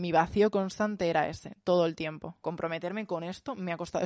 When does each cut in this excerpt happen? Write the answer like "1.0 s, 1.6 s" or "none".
2.4 s